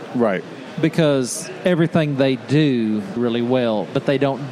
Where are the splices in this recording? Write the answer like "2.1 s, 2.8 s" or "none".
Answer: 3.2 s